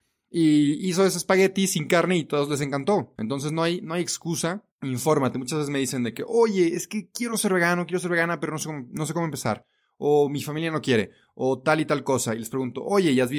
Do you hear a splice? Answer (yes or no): yes